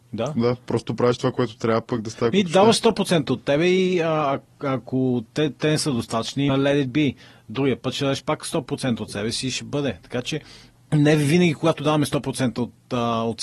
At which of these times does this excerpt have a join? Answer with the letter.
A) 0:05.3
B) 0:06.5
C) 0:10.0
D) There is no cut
B